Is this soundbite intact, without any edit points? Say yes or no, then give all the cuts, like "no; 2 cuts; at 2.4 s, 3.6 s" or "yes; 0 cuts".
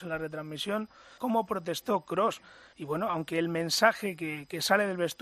no; 2 cuts; at 1.2 s, 2.7 s